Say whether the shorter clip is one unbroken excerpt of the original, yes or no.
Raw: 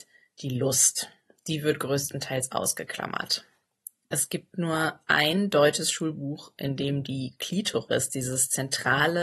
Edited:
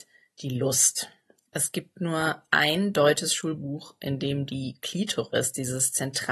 no